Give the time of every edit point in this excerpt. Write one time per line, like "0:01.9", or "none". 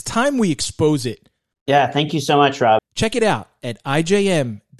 0:01.5
0:02.8